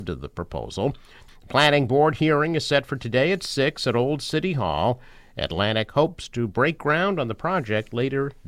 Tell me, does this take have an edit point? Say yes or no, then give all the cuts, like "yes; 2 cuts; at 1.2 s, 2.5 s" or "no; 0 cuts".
yes; 1 cut; at 1.3 s